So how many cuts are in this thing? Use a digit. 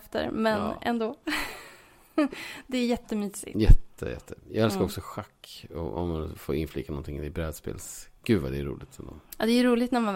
1